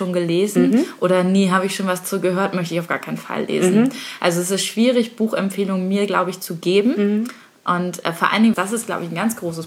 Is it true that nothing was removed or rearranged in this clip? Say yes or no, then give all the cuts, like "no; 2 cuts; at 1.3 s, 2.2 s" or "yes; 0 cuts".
no; 1 cut; at 8.5 s